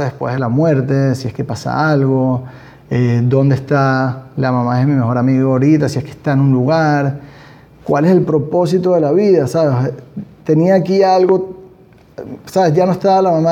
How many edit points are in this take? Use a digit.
0